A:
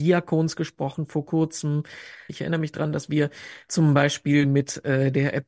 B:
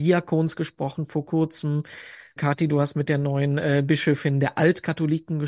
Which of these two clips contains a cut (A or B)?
A